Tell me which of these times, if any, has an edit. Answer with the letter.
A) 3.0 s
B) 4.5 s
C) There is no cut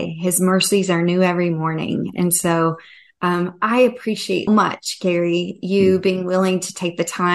B